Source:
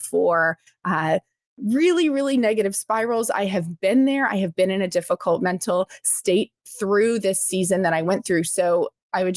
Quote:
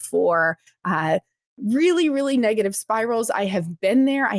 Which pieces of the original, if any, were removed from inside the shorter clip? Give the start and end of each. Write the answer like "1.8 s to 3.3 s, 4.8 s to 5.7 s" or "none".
none

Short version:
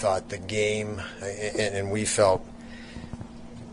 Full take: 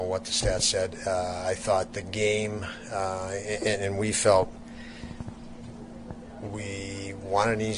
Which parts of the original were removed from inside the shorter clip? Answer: 2.9 s to 3.3 s

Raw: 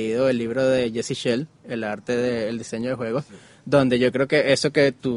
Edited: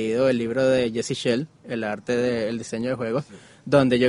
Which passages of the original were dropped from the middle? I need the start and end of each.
none

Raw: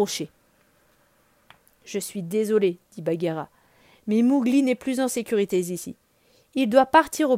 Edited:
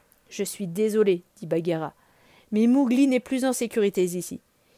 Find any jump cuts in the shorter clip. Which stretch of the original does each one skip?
none

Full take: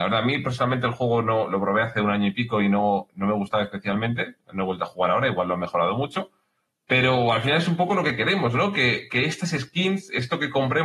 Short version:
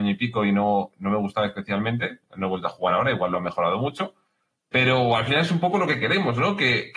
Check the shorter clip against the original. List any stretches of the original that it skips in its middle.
none

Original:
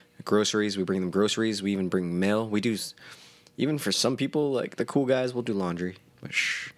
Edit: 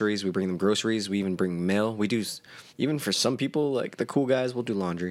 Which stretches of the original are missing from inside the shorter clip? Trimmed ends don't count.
3.2 s to 3.5 s

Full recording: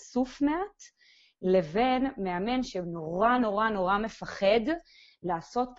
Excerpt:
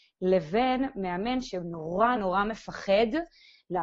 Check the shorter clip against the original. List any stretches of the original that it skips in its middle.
3.4 s to 3.7 s

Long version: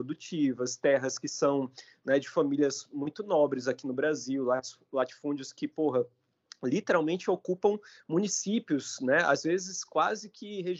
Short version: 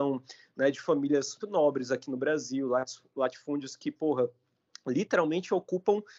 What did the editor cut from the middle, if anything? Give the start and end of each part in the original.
2.9 s to 3.2 s

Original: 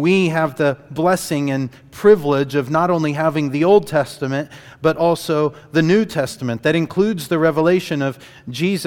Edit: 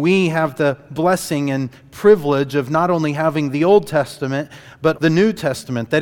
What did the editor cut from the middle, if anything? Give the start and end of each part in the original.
4.9 s to 5.7 s

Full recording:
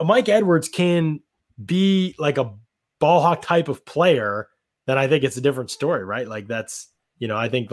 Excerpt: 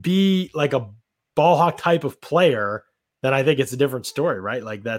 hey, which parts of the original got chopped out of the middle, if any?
none

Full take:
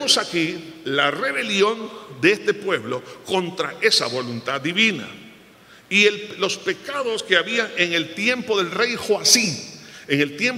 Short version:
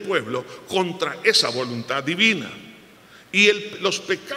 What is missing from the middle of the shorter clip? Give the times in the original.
none

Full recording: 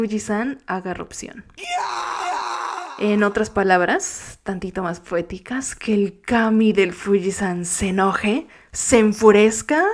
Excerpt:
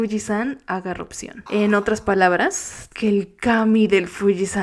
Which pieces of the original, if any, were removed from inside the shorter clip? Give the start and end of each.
1.5 s to 2.9 s, 4.4 s to 5.8 s

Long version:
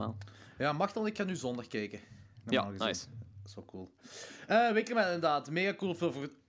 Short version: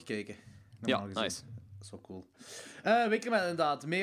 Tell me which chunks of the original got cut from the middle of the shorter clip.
none

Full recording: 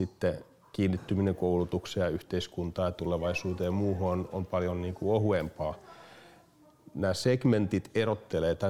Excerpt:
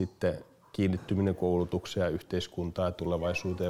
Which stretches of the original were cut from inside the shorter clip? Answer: none

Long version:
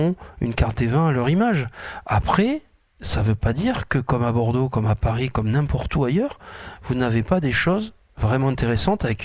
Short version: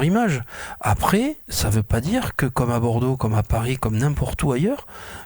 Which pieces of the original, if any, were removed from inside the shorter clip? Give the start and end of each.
2.7 s to 2.9 s

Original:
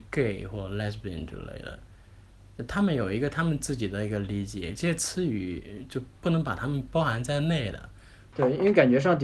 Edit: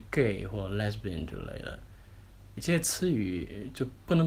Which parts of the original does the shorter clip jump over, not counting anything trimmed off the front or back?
2.6 s to 4.7 s

